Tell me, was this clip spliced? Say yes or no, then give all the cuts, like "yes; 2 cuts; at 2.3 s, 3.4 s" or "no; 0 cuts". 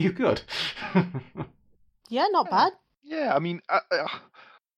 no; 0 cuts